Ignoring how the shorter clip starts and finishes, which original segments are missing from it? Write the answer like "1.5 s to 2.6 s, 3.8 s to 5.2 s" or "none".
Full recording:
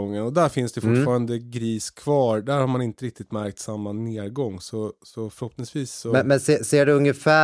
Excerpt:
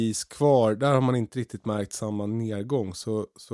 none